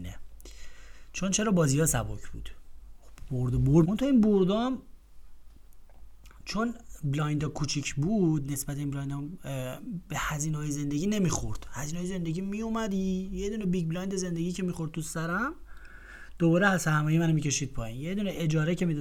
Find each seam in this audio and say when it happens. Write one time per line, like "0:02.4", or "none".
0:03.8